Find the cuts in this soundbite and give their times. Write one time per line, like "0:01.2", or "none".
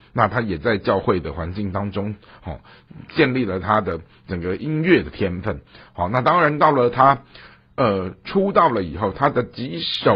none